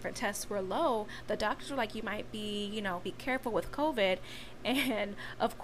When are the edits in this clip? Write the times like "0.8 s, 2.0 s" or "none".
3.0 s